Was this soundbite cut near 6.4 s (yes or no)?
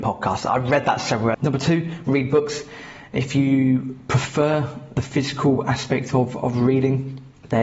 no